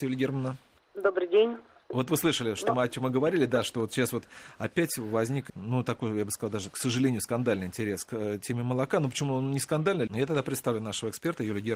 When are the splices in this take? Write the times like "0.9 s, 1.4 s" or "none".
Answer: 10.1 s